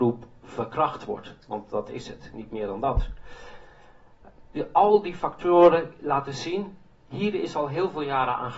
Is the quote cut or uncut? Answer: cut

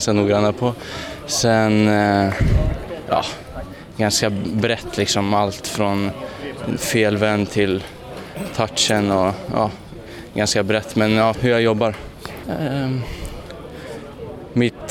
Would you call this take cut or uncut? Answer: cut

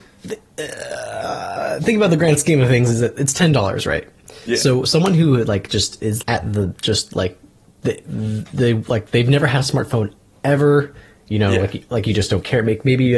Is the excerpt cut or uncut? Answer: cut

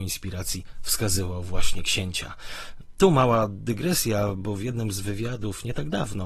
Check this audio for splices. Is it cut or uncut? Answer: uncut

